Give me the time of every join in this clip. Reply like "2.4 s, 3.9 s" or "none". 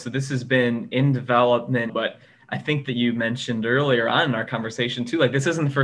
1.9 s